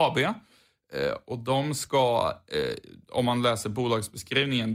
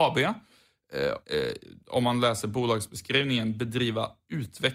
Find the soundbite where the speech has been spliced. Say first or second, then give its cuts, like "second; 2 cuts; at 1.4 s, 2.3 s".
second; 1 cut; at 1.2 s